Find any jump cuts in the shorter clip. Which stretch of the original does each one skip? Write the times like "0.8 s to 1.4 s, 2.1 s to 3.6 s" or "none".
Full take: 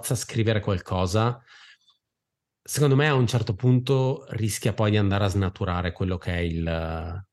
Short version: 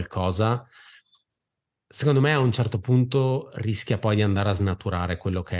none